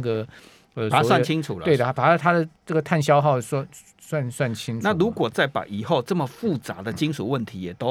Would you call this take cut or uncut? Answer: uncut